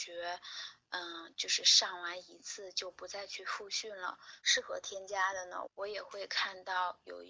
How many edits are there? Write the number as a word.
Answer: two